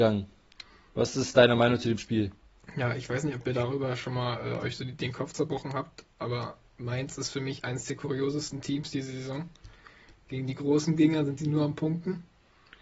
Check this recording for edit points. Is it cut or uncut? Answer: uncut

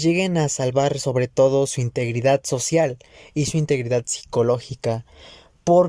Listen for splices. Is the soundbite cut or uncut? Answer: uncut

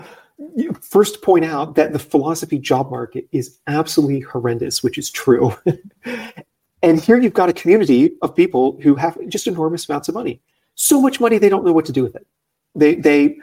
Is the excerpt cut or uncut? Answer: uncut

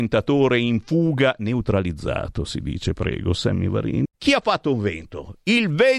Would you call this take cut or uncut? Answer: cut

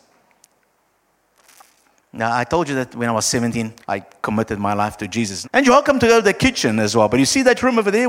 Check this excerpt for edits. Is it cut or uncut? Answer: cut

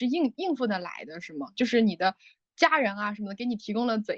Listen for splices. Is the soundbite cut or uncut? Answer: uncut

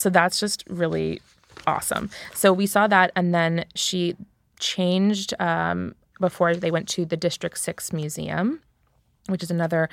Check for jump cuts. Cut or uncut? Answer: cut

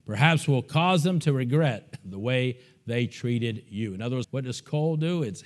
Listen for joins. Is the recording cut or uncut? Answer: cut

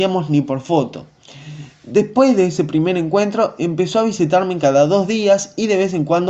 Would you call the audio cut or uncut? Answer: uncut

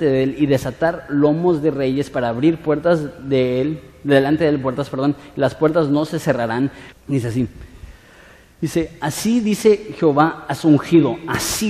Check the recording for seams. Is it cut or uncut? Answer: cut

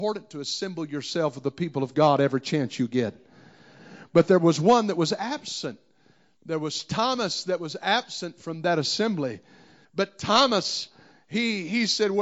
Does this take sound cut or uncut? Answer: cut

